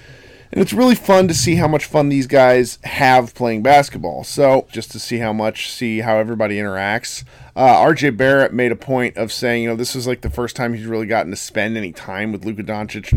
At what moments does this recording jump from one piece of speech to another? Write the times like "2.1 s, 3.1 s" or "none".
4.7 s